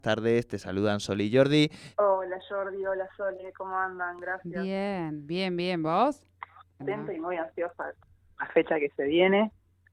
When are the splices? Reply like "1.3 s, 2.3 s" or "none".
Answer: 1.9 s, 6.8 s